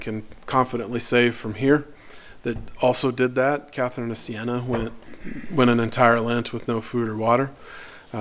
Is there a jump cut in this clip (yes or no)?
no